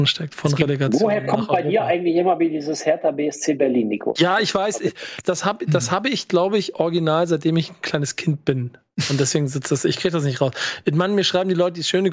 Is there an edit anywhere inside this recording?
yes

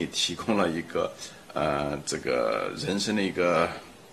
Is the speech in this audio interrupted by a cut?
yes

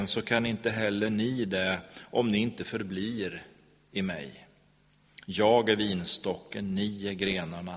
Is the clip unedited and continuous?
yes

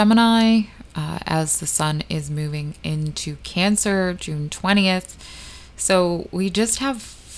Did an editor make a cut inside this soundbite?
no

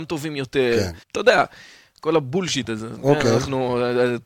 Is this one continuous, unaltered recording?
no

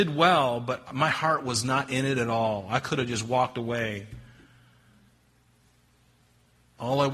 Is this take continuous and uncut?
yes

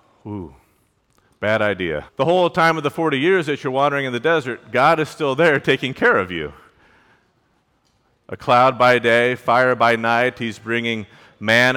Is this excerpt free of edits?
no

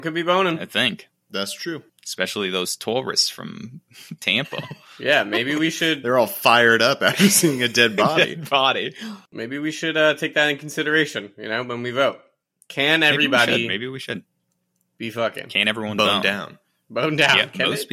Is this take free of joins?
yes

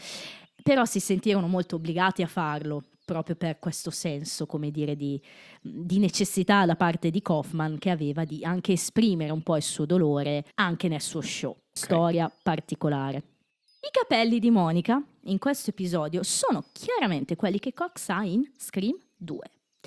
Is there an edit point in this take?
yes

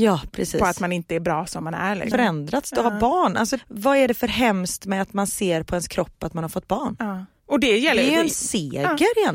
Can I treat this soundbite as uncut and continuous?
no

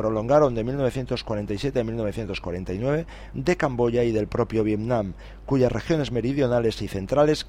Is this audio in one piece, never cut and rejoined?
no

